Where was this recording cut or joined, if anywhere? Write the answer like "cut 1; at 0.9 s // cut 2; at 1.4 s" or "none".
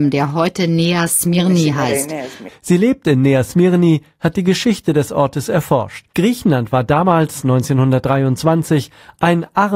cut 1; at 2.5 s // cut 2; at 6.1 s

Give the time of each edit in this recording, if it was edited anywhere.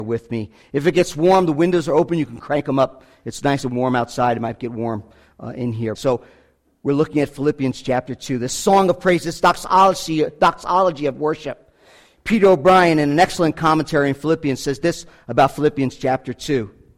cut 1; at 5.9 s

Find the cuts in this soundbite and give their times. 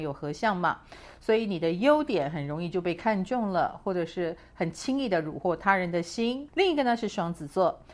cut 1; at 6.5 s

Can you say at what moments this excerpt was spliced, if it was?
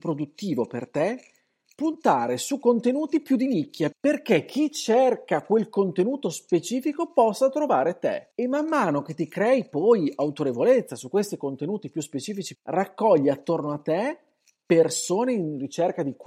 cut 1; at 3.9 s // cut 2; at 8.3 s // cut 3; at 12.6 s

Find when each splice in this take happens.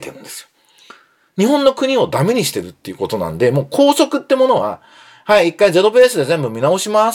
none

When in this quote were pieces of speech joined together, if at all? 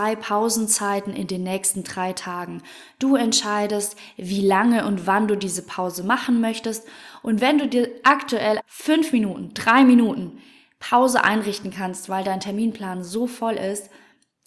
cut 1; at 8.6 s

